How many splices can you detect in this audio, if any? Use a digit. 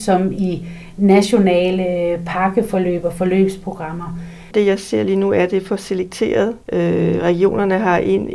2